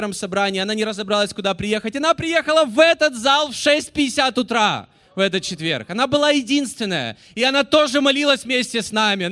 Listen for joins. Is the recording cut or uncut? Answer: uncut